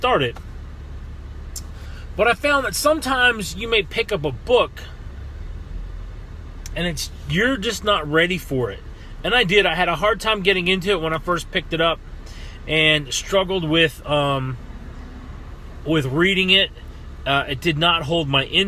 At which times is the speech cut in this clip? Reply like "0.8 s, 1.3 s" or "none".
none